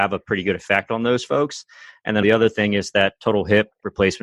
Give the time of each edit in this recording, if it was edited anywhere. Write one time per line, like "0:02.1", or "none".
0:02.2